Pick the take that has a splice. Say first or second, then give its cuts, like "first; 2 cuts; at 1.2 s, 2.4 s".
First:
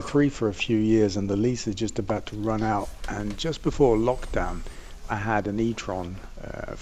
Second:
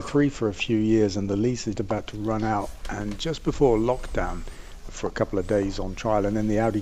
second; 2 cuts; at 1.8 s, 4.9 s